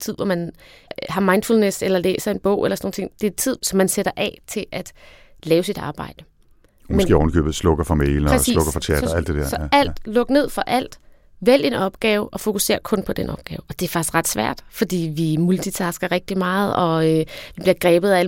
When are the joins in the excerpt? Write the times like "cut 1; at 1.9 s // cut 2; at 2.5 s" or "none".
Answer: none